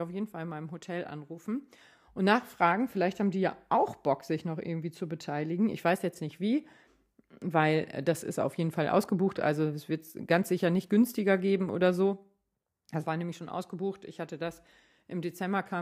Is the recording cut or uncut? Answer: uncut